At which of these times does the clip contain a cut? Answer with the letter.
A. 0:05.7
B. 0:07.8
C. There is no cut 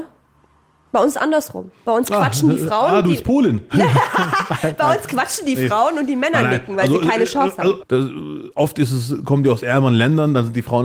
B